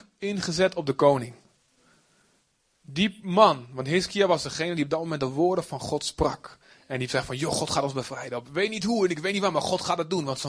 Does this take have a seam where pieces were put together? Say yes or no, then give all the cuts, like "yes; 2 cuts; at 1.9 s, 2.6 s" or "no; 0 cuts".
no; 0 cuts